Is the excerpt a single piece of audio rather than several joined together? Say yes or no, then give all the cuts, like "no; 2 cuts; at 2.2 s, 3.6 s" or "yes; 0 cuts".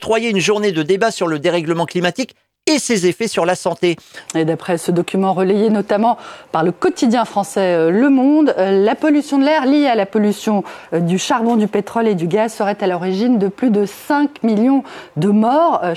no; 2 cuts; at 4.3 s, 10.9 s